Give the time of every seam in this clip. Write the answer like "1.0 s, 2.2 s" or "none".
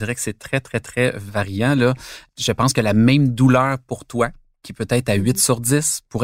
none